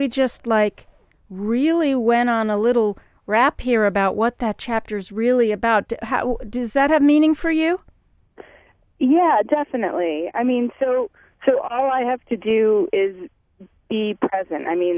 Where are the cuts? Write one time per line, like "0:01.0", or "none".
none